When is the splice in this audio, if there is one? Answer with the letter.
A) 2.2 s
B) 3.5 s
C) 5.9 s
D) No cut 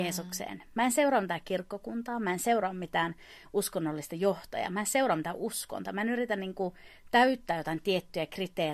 D